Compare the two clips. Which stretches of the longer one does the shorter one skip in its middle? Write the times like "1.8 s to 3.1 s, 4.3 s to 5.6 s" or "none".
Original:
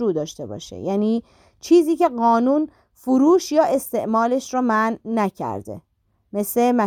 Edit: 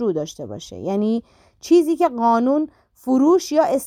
none